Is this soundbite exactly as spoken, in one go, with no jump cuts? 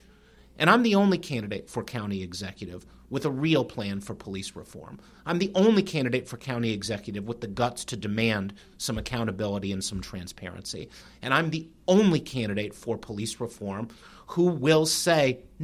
yes; 0 cuts

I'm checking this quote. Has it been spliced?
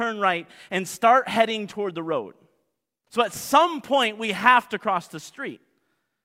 yes; 1 cut; at 3.1 s

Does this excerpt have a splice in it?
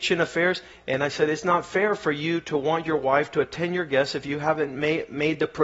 no; 0 cuts

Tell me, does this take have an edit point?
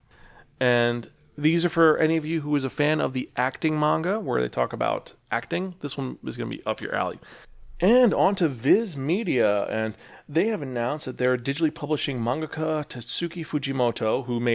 no; 0 cuts

